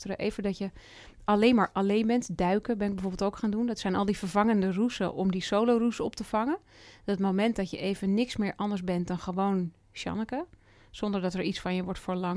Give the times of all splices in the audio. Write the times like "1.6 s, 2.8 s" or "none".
none